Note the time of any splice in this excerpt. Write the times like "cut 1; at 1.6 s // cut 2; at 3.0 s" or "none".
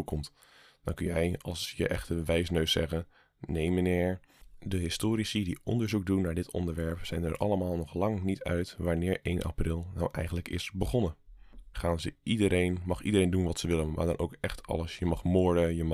cut 1; at 11.7 s

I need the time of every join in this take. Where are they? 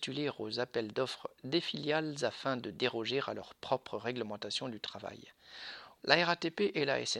cut 1; at 6.0 s

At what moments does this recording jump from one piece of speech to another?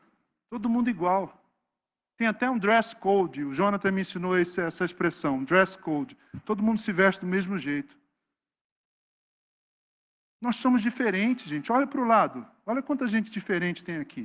none

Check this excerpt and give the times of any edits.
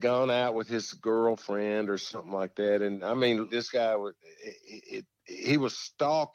cut 1; at 3.5 s

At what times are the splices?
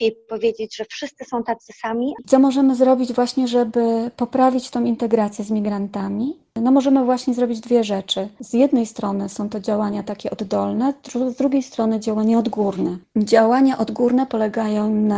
none

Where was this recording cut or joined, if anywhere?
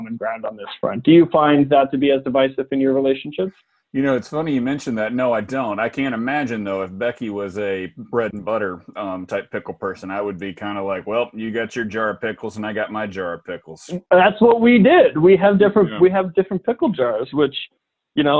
none

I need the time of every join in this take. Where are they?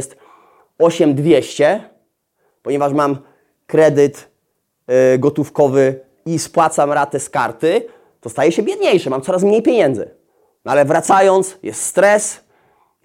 cut 1; at 10.5 s

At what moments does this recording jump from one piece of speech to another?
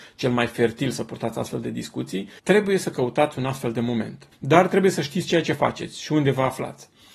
cut 1; at 2.4 s // cut 2; at 4.3 s

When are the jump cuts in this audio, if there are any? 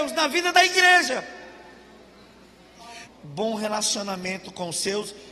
cut 1; at 3.0 s

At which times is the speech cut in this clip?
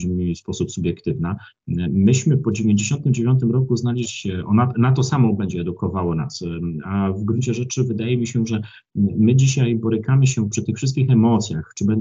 cut 1; at 4.0 s

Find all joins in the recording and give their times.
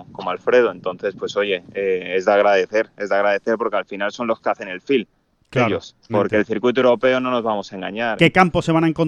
cut 1; at 6.1 s // cut 2; at 8.2 s

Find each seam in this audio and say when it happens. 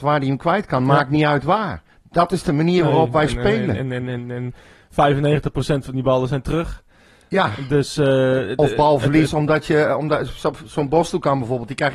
none

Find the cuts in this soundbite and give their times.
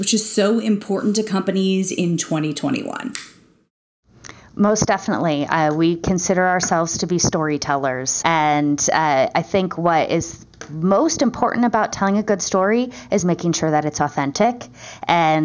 cut 1; at 8.2 s

